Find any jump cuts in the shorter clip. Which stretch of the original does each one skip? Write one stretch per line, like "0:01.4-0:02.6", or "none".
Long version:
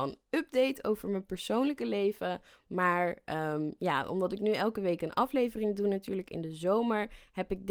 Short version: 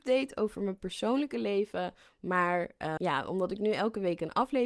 0:03.4-0:03.8